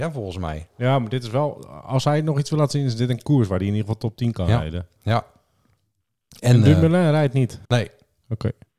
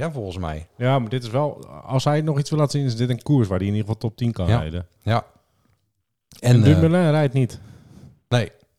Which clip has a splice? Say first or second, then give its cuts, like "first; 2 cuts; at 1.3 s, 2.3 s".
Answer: first; 1 cut; at 7.7 s